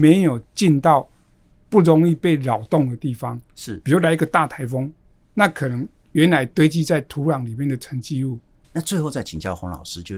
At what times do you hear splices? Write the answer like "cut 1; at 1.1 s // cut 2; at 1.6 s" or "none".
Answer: cut 1; at 8.6 s

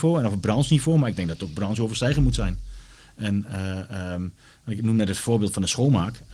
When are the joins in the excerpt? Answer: none

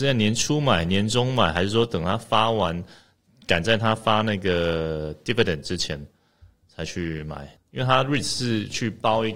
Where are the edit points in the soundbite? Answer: cut 1; at 7.6 s

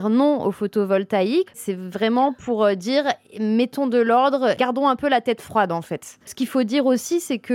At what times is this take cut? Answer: cut 1; at 1.5 s // cut 2; at 6.3 s

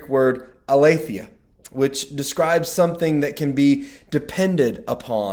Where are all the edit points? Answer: none

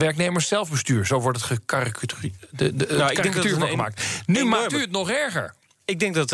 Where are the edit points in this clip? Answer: none

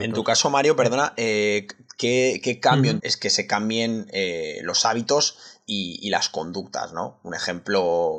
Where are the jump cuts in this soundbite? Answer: cut 1; at 3.0 s

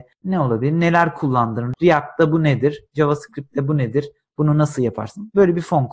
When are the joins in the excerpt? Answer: none

